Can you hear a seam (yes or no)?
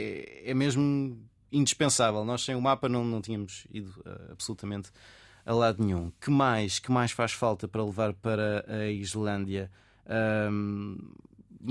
no